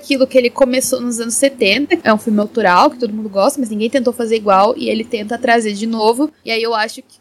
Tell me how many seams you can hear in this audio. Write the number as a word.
one